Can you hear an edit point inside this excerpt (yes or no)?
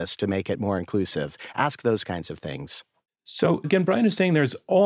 yes